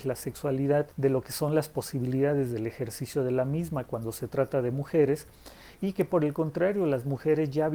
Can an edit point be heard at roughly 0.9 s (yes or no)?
yes